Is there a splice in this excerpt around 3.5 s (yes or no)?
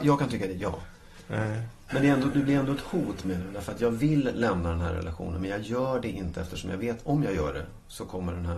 no